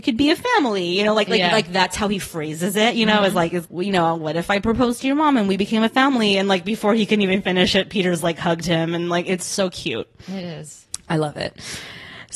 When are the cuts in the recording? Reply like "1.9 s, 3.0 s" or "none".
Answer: 3.6 s